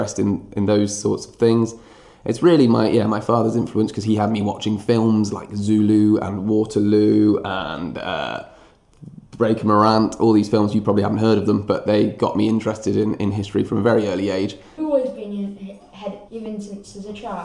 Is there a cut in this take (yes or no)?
yes